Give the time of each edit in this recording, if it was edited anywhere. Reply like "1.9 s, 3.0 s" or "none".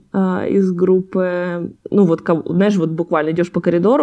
1.8 s